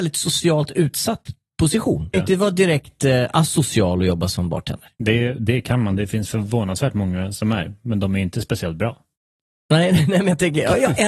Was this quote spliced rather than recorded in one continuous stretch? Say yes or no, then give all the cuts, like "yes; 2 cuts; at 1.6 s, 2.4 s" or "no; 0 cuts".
yes; 1 cut; at 2.1 s